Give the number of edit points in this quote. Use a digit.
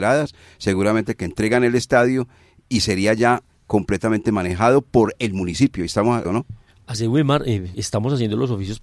2